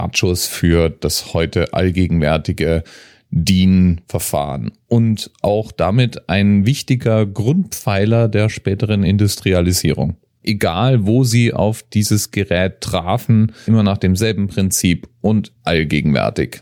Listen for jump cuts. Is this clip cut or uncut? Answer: cut